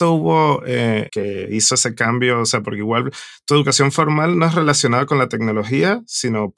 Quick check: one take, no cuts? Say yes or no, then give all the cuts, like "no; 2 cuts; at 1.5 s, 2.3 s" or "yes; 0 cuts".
no; 1 cut; at 1.1 s